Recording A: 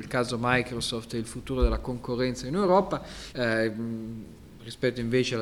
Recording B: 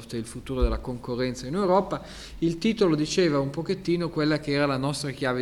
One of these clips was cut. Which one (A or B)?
A